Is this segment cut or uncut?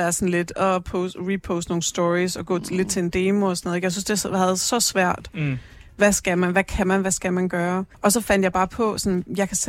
cut